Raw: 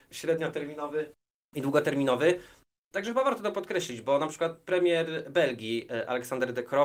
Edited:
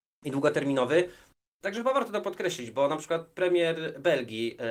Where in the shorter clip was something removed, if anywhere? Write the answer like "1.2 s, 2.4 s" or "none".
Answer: none